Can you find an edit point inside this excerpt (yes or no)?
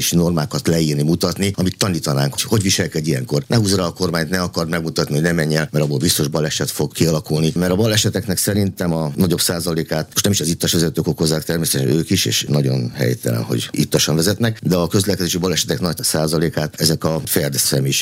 yes